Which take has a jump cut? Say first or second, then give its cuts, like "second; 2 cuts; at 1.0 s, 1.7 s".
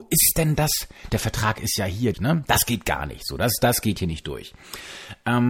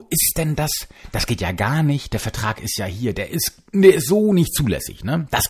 first; 2 cuts; at 1.1 s, 2.1 s